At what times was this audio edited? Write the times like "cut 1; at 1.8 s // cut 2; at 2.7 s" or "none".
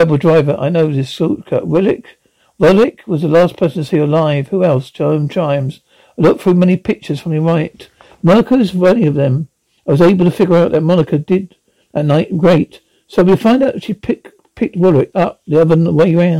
none